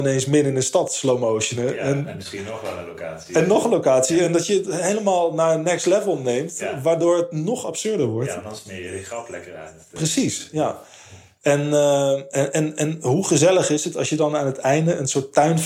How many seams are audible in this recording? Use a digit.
0